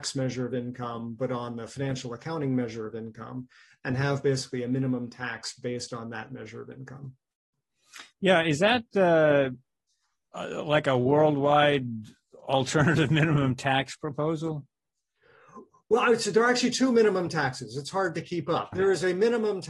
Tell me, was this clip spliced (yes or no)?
yes